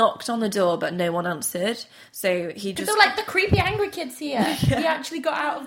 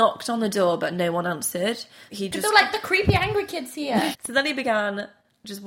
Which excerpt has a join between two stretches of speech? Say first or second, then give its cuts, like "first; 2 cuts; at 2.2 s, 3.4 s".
second; 2 cuts; at 2.1 s, 4.1 s